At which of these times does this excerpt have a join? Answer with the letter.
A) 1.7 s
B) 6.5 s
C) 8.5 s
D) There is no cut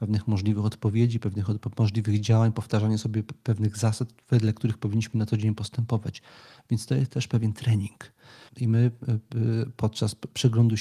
C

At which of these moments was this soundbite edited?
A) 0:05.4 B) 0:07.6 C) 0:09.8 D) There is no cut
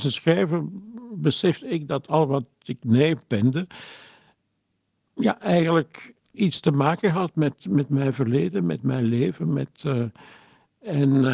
D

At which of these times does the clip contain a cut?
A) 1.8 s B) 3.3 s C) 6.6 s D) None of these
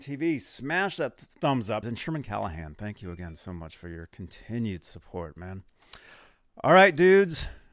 A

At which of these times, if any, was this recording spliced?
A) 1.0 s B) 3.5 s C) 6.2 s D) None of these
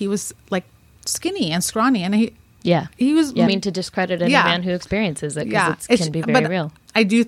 B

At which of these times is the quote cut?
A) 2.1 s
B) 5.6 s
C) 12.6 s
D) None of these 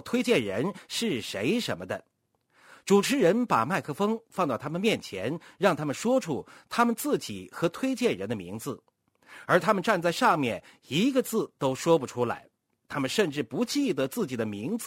D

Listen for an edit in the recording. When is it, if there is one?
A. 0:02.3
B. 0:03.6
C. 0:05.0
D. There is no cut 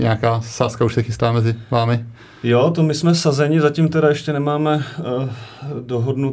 D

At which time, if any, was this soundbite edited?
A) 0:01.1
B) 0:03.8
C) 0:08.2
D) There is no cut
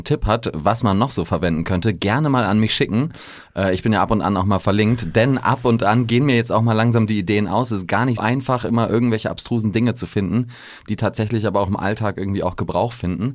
C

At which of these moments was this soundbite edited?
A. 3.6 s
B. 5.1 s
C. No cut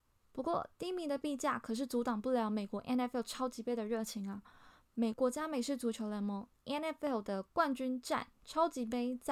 B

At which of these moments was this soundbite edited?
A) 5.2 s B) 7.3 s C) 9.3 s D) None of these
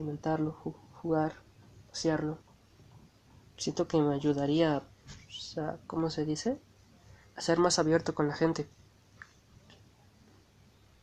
D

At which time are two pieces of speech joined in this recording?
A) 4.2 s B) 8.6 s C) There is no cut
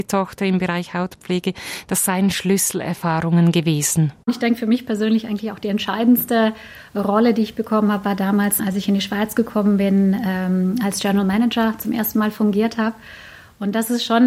B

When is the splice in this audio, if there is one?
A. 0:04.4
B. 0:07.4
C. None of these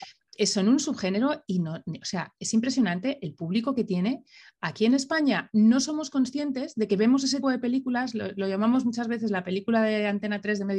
B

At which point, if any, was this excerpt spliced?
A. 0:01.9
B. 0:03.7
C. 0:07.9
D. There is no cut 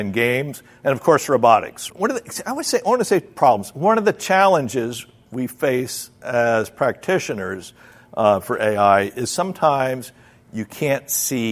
A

